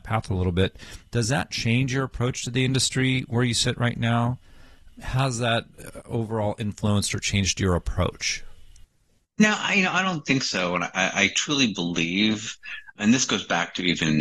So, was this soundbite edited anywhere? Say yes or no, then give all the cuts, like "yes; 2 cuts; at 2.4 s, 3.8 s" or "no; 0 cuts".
yes; 2 cuts; at 4.9 s, 13.0 s